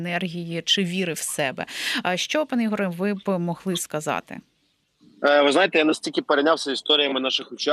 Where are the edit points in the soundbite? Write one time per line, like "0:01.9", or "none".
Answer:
none